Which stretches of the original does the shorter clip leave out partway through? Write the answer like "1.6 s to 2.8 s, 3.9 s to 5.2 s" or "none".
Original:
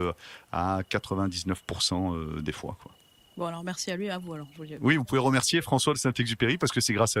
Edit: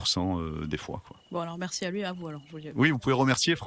3.0 s to 3.3 s